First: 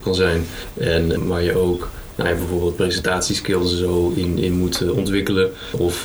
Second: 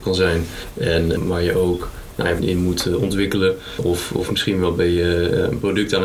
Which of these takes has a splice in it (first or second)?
second